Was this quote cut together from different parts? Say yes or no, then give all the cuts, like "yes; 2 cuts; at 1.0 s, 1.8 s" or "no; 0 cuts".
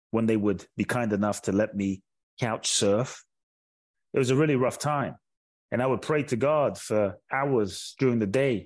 yes; 1 cut; at 5.6 s